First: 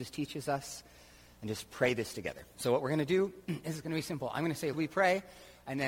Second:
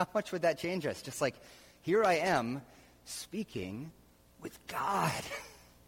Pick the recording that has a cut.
first; 1 cut; at 4.7 s

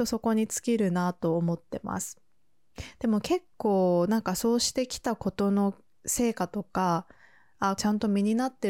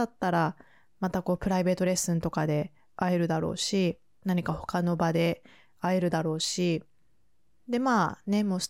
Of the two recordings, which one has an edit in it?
first; 2 cuts; at 3.5 s, 7.8 s

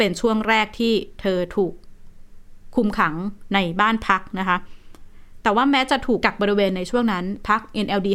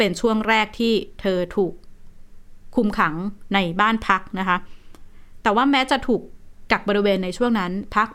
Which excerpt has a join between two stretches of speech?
first; 1 cut; at 6.2 s

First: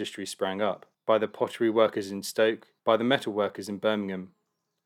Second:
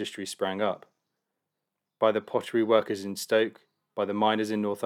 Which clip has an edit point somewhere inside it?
first; 2 cuts; at 0.9 s, 2.8 s

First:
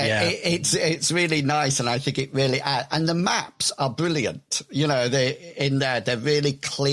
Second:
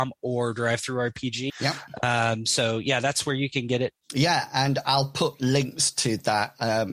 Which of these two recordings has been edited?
second; 2 cuts; at 1.5 s, 4.0 s

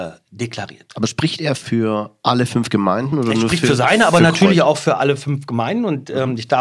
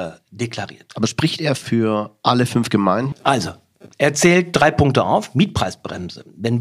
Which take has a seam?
second; 1 cut; at 3.1 s

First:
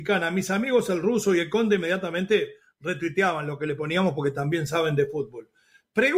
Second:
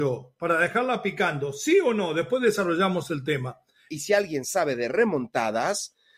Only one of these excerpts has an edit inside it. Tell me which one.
second; 1 cut; at 3.9 s

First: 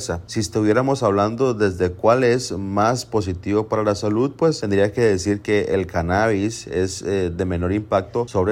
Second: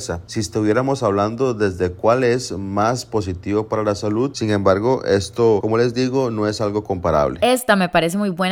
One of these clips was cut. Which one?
second; 1 cut; at 4.3 s

